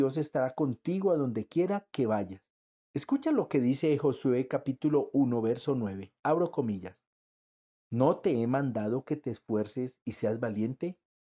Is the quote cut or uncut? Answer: cut